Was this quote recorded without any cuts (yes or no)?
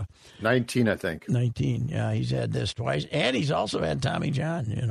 yes